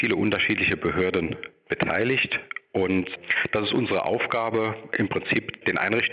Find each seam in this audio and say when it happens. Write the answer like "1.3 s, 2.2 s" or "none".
none